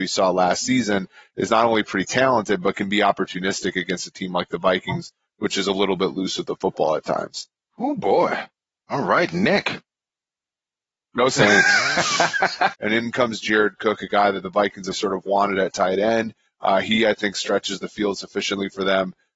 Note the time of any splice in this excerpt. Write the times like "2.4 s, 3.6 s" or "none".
12.7 s, 14.9 s